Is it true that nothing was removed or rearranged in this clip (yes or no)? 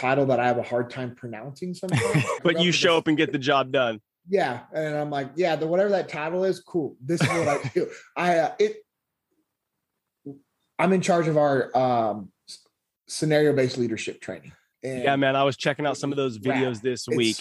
no